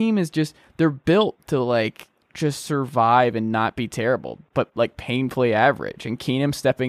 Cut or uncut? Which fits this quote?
uncut